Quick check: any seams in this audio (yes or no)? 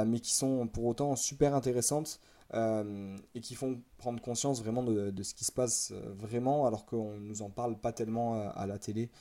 no